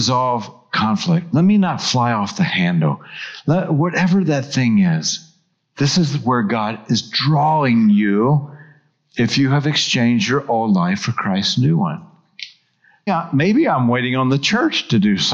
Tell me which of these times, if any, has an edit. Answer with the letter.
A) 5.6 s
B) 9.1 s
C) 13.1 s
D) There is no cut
C